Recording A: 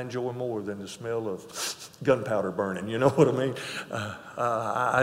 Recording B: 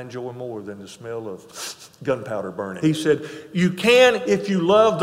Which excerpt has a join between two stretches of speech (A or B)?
B